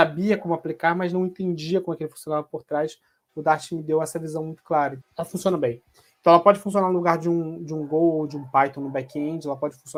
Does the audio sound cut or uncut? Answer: cut